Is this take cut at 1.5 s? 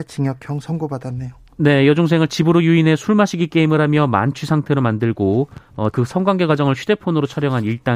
no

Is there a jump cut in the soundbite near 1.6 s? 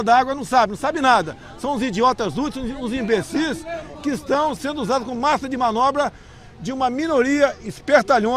no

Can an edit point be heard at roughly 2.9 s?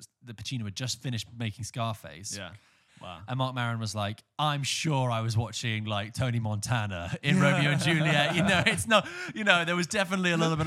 yes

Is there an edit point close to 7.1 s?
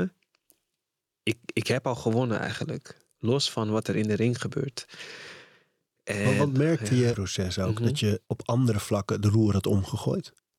yes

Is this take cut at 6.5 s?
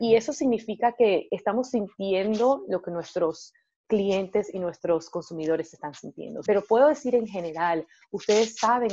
yes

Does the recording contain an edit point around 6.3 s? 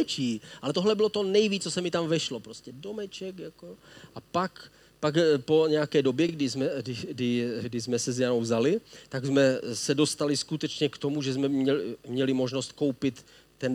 no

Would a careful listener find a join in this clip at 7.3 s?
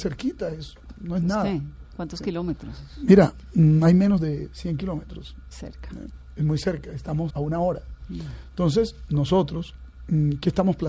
yes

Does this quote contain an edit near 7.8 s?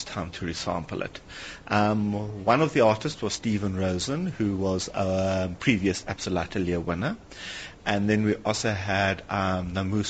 no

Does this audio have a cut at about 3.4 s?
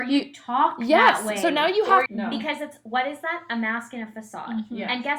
no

